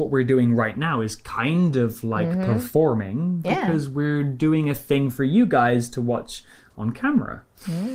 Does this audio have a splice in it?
no; 0 cuts

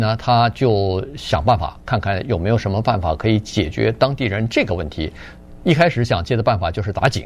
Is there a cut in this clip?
no; 0 cuts

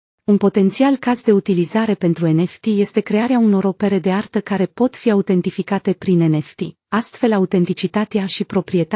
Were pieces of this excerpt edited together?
no; 0 cuts

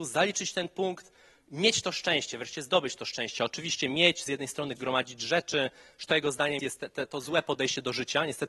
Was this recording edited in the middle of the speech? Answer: yes; 3 cuts; at 3.4 s, 4.8 s, 6.6 s

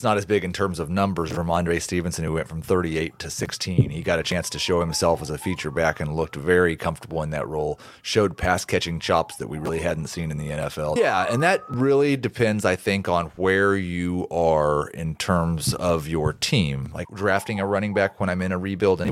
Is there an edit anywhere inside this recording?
yes; 2 cuts; at 11.0 s, 17.0 s

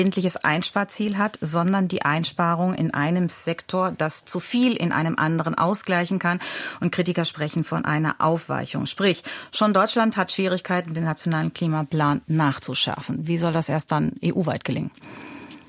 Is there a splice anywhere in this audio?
no; 0 cuts

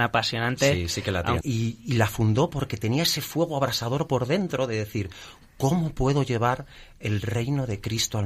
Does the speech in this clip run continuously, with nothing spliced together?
no; 1 cut; at 1.4 s

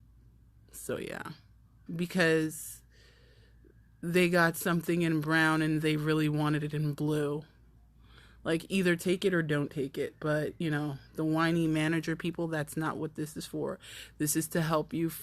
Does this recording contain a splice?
yes; 1 cut; at 1.9 s

